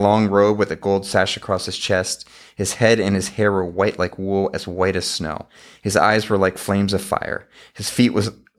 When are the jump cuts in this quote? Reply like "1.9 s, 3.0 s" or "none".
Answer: none